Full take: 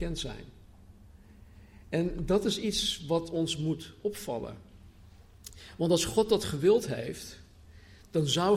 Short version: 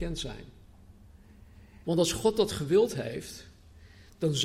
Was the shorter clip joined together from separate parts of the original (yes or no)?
yes